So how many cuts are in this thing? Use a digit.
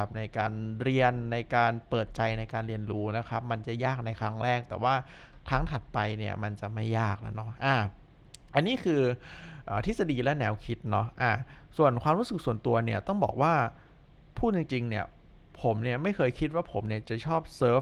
0